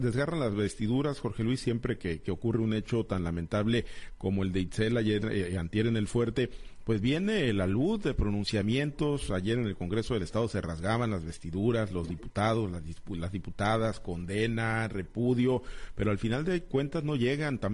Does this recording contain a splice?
no; 0 cuts

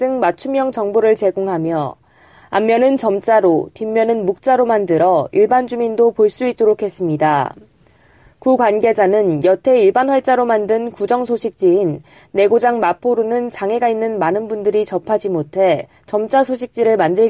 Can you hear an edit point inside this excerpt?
no; 0 cuts

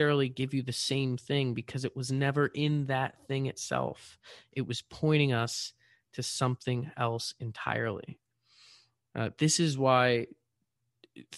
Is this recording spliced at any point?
no; 0 cuts

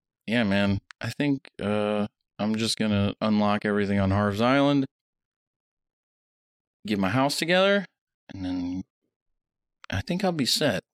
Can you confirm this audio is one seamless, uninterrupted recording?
yes; 0 cuts

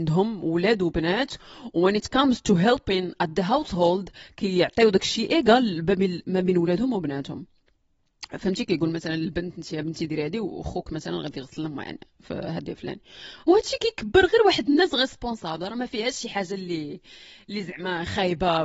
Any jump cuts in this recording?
yes; 1 cut; at 12.8 s

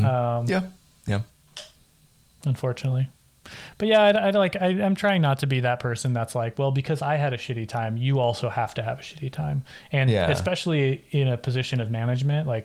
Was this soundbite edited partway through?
no; 0 cuts

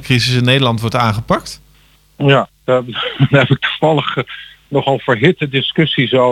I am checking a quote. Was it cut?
no; 0 cuts

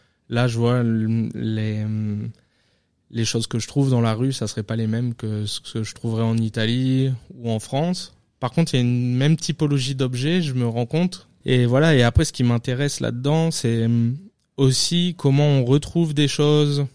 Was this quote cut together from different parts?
yes; 1 cut; at 11.4 s

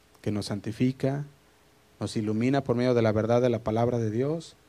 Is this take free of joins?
yes; 0 cuts

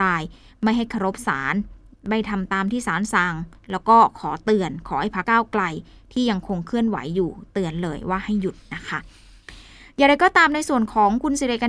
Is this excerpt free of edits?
no; 1 cut; at 5.2 s

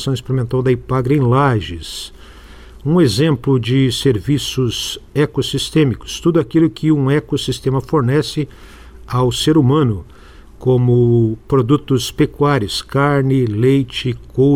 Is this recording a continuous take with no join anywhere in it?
yes; 0 cuts

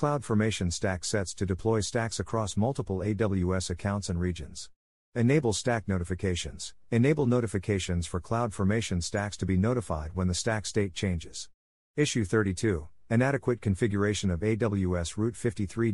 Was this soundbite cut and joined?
no; 0 cuts

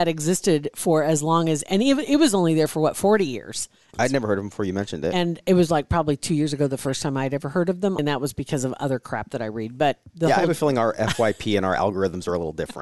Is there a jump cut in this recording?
yes; 3 cuts; at 3.9 s, 8.0 s, 10.1 s

